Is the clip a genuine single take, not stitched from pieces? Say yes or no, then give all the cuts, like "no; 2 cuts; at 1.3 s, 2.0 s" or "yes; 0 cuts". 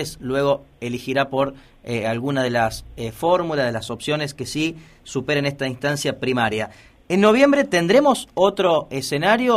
yes; 0 cuts